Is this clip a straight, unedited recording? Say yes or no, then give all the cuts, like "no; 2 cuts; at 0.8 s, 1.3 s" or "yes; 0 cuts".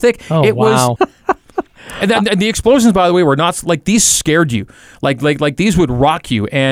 no; 1 cut; at 1.0 s